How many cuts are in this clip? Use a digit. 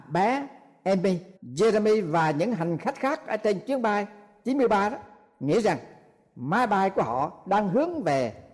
1